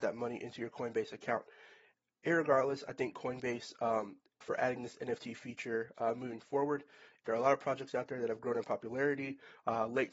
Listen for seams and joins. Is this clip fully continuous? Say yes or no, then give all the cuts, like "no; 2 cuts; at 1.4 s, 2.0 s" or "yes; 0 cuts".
no; 2 cuts; at 4.4 s, 7.2 s